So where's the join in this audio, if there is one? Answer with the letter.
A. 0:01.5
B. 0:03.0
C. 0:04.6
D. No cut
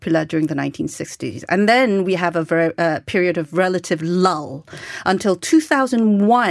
D